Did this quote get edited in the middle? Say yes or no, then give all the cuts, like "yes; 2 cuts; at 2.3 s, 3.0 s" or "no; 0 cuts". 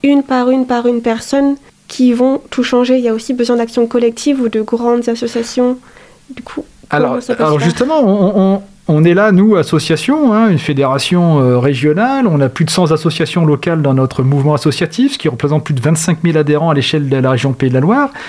no; 0 cuts